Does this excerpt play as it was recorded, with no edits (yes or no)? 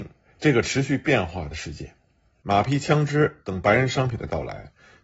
no